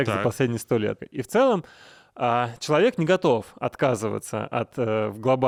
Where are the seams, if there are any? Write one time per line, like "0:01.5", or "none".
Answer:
0:01.0